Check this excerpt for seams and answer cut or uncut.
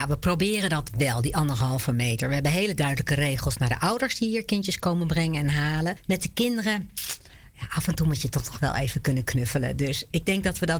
uncut